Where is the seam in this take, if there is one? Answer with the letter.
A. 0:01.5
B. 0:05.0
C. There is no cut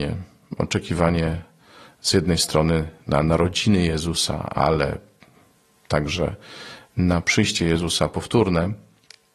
C